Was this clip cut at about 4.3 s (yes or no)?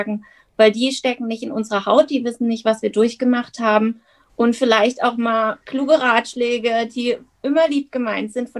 yes